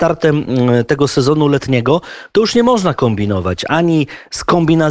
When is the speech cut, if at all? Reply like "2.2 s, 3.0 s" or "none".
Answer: none